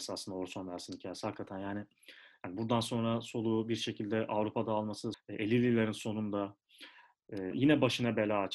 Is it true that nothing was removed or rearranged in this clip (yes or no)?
no